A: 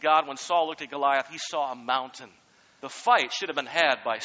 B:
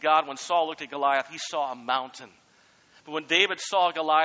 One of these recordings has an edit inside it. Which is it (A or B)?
A